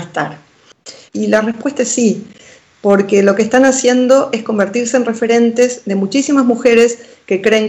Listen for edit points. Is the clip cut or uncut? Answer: cut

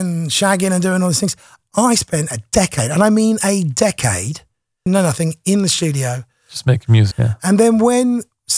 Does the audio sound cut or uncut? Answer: cut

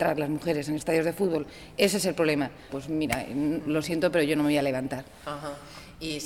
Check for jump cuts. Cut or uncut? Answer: cut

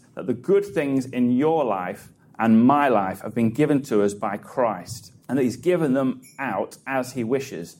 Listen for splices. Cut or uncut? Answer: cut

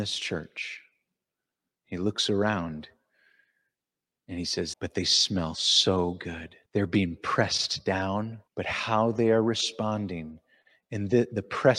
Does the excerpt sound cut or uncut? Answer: cut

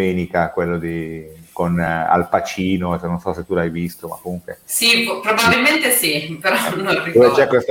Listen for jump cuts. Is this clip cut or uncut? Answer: uncut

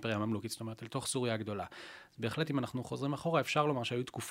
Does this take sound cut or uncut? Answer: uncut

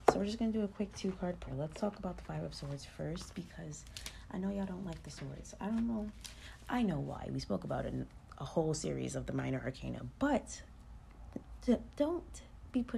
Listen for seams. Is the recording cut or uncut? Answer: cut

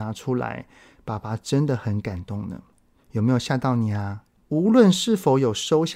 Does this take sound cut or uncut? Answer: cut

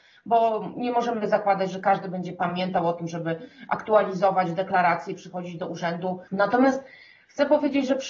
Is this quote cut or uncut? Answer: cut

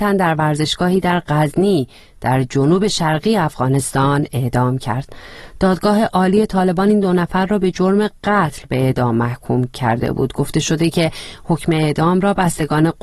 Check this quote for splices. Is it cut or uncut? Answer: uncut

